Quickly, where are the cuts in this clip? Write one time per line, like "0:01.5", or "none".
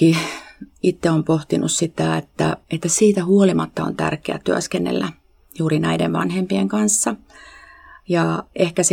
0:02.6